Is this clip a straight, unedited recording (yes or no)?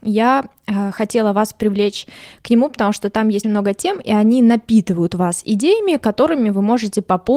no